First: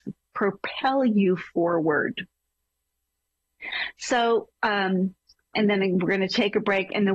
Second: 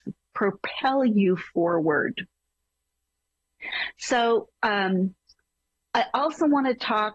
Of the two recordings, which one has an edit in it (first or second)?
first